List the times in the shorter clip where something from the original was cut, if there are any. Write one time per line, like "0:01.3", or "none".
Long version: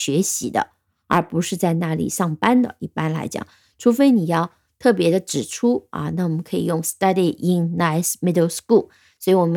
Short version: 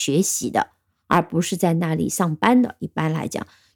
none